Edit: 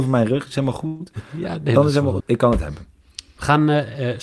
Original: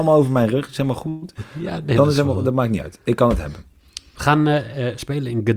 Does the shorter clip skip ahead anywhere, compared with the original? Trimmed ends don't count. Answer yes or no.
yes